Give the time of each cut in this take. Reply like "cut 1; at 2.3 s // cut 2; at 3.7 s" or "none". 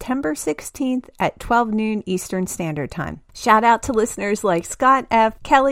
cut 1; at 3.3 s